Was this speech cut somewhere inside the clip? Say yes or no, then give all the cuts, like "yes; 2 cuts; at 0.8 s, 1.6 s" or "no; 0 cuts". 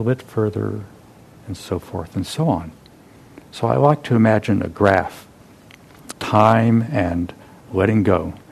yes; 1 cut; at 6.1 s